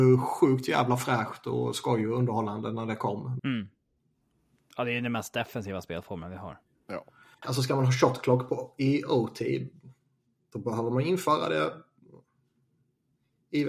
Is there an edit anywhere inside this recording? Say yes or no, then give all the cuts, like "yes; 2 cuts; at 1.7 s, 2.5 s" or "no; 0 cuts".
yes; 2 cuts; at 3.4 s, 7.4 s